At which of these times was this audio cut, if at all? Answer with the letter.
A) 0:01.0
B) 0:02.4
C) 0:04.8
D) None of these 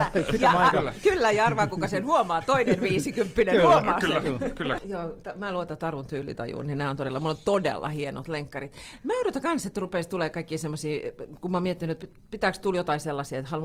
C